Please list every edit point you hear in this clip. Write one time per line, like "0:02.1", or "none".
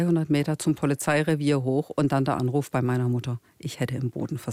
none